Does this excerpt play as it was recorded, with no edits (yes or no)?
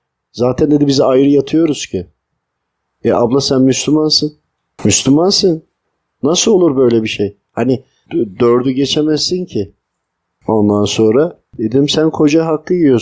yes